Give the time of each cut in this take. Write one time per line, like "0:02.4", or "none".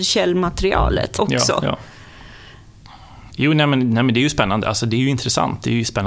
0:01.2
0:03.3